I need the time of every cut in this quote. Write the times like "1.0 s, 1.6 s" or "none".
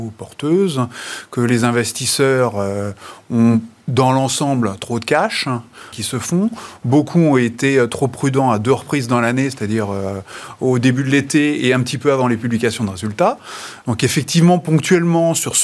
5.9 s, 13.8 s